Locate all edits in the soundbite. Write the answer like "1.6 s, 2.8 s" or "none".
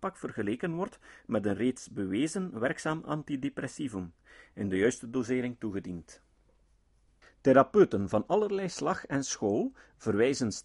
7.2 s

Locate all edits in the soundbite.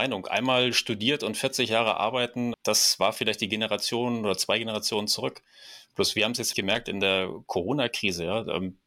2.5 s, 6.5 s

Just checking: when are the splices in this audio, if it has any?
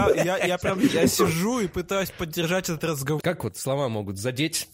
3.2 s

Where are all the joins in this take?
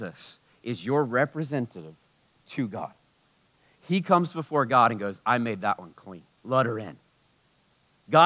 6.3 s

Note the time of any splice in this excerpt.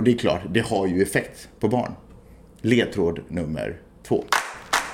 none

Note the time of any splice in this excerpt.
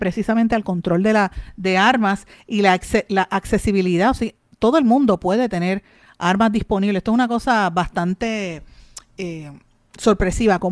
none

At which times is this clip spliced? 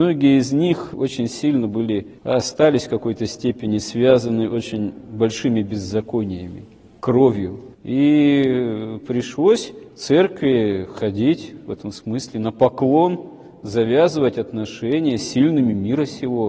7.7 s

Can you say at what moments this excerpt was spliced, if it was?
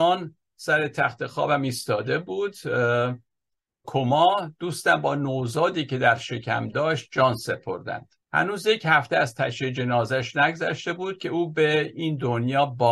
3.8 s, 8.2 s

